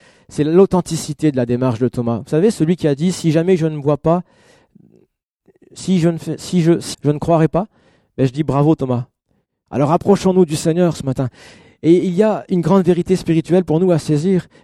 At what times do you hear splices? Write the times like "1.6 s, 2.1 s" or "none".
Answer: 6.9 s, 9.7 s